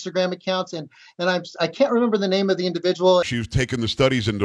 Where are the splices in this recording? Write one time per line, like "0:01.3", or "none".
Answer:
0:03.2